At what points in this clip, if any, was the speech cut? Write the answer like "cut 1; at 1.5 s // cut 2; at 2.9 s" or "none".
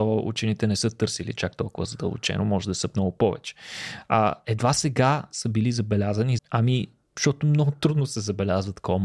cut 1; at 6.4 s